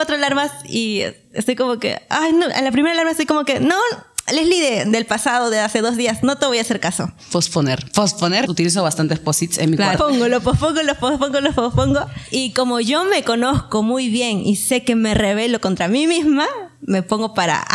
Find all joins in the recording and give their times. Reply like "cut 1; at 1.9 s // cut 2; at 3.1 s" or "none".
cut 1; at 8.5 s // cut 2; at 10.0 s